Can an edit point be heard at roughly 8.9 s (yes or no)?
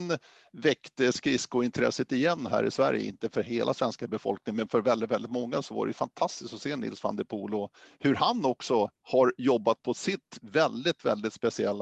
yes